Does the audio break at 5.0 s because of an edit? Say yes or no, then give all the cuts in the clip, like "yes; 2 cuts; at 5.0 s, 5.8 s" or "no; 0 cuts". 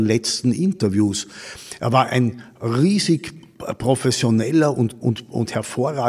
yes; 1 cut; at 5.0 s